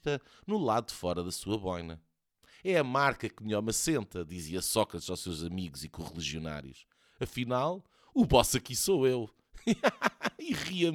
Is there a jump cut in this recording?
no; 0 cuts

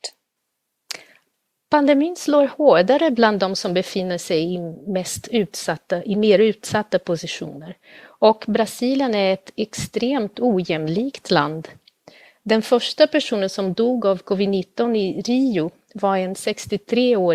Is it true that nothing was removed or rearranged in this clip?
yes; 0 cuts

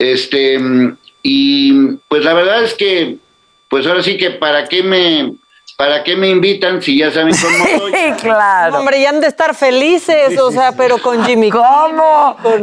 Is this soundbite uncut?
yes; 0 cuts

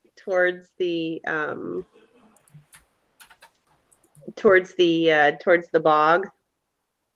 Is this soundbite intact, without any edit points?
yes; 0 cuts

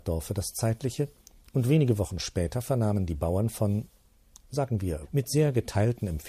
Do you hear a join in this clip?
yes; 1 cut; at 5.0 s

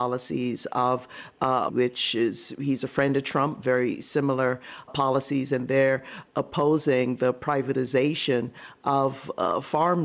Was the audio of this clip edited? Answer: yes; 2 cuts; at 1.7 s, 4.9 s

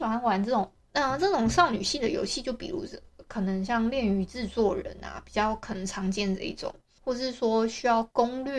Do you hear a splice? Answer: no; 0 cuts

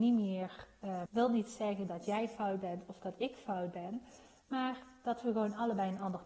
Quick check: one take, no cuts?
no; 1 cut; at 1.1 s

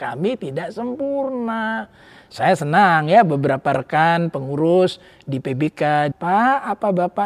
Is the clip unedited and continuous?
no; 1 cut; at 6.1 s

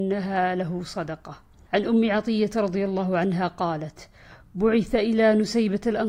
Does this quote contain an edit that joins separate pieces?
yes; 1 cut; at 1.7 s

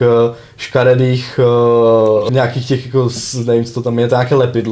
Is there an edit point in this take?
yes; 1 cut; at 2.3 s

